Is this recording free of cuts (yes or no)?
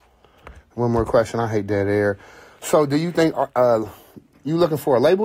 yes